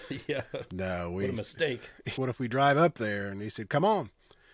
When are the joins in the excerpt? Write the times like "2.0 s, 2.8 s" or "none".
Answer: 2.2 s